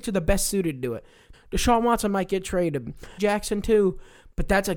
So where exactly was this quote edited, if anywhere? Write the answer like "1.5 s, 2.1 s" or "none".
1.3 s, 3.2 s